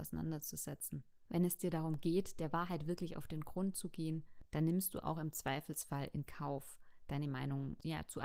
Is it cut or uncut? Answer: uncut